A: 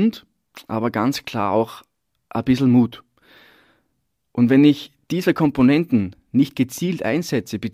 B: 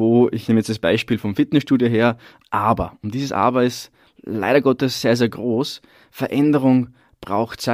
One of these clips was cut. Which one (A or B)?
B